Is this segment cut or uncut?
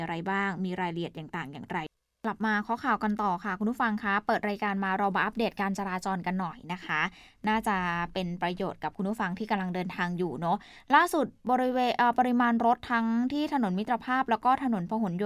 uncut